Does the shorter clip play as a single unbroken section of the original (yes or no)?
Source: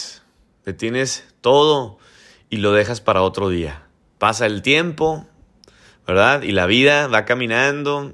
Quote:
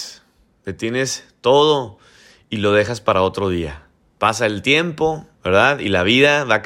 no